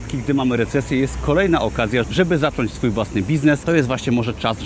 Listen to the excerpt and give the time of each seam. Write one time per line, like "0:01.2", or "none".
0:02.0
0:03.6